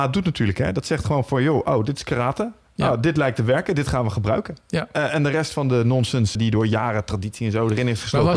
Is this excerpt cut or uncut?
cut